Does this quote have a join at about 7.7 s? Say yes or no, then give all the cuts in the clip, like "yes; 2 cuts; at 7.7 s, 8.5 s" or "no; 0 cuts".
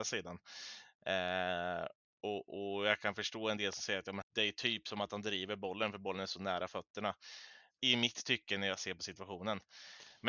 yes; 2 cuts; at 4.2 s, 7.7 s